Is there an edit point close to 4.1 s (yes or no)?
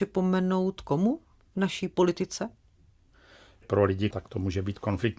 yes